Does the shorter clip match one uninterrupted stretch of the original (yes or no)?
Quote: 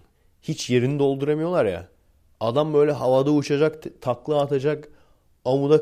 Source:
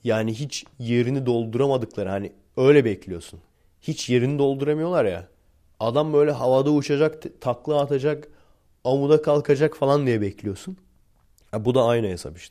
yes